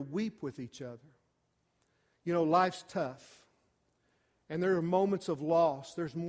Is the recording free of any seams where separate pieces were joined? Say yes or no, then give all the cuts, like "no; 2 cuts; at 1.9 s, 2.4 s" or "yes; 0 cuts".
yes; 0 cuts